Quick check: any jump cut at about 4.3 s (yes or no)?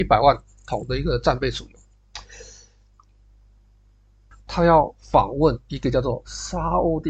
yes